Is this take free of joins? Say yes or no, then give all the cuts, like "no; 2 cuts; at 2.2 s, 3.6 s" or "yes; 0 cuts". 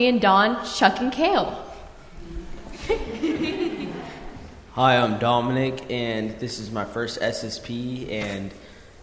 yes; 0 cuts